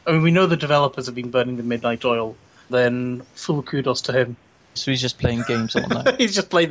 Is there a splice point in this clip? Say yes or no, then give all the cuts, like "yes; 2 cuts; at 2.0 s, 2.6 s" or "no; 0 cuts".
yes; 2 cuts; at 2.7 s, 4.8 s